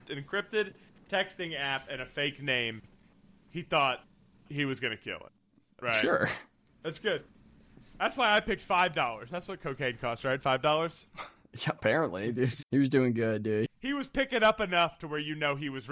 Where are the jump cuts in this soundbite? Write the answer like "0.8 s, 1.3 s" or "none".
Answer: 6.7 s, 12.6 s, 13.7 s